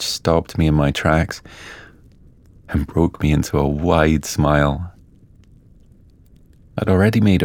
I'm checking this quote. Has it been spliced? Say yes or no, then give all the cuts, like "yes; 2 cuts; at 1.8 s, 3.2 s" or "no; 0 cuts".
no; 0 cuts